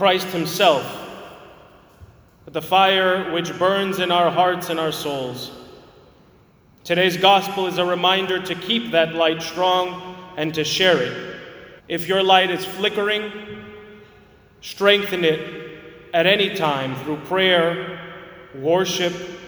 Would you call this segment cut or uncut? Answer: cut